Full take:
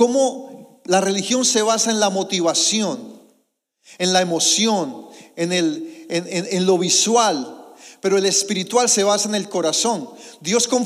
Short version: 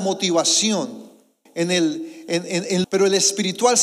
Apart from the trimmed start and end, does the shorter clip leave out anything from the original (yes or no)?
yes